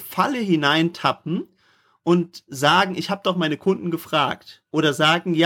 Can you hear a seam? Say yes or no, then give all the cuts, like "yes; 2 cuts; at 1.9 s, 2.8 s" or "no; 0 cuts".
no; 0 cuts